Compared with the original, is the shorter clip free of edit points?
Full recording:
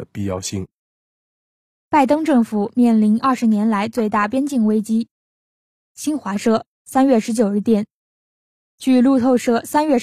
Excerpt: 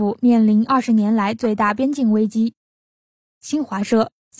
yes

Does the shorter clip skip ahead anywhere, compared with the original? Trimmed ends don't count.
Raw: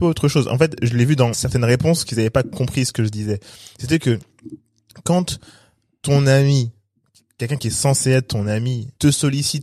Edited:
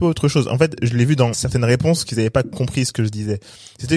no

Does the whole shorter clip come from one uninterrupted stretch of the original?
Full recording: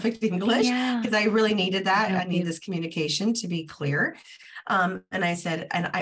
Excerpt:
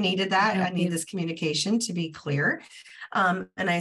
yes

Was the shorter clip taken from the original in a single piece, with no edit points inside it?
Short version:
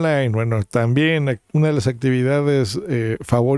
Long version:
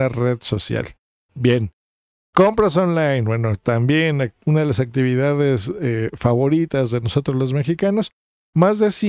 yes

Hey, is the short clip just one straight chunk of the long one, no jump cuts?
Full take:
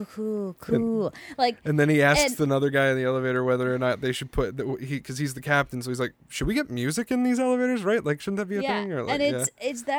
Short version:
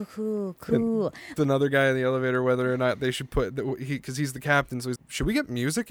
no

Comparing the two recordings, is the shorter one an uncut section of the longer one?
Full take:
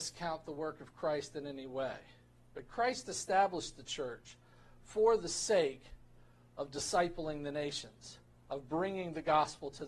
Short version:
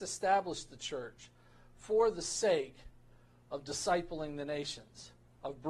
yes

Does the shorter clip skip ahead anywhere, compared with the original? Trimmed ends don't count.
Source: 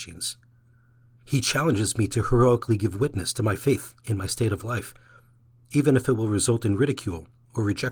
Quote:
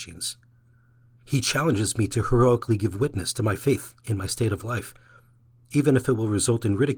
no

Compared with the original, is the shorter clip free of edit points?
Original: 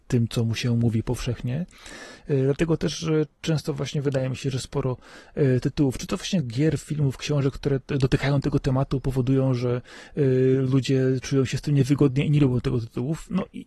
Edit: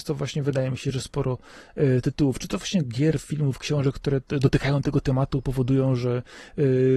yes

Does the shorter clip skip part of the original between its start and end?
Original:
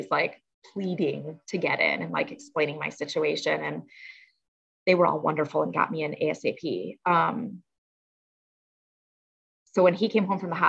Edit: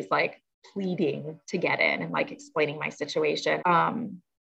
yes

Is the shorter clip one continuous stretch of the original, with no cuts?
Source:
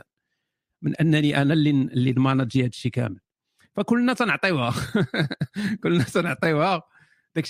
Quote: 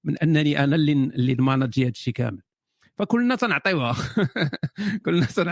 yes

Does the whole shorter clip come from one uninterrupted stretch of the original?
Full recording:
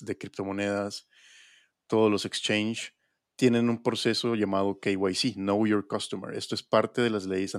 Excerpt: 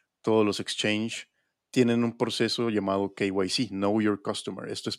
yes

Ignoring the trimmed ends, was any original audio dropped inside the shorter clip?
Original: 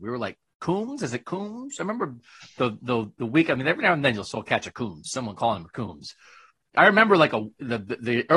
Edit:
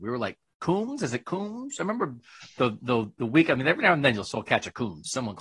no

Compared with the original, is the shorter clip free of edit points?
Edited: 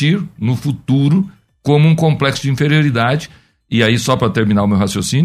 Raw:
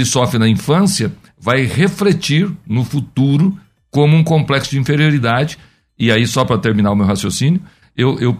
yes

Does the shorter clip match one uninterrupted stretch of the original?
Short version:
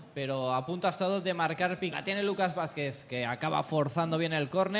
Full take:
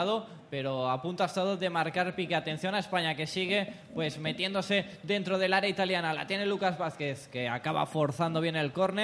no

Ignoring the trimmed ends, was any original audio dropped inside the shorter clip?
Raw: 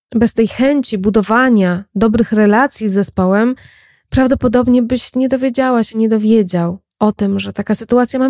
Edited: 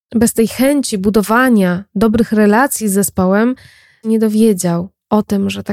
yes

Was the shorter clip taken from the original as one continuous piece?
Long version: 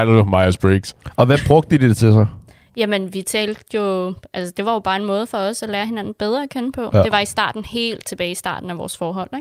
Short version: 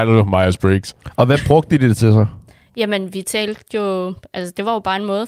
yes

